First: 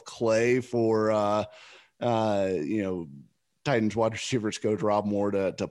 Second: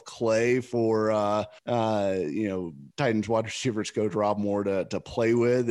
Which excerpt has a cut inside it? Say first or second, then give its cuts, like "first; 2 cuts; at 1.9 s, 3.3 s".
second; 2 cuts; at 1.6 s, 2.9 s